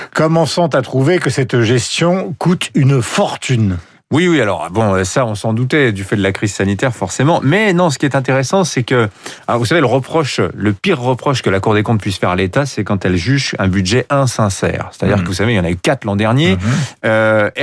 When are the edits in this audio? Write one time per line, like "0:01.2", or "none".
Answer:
0:15.3